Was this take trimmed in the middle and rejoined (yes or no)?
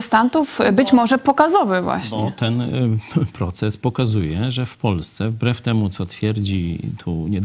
no